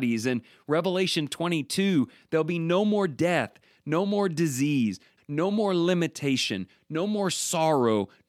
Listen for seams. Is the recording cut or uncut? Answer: cut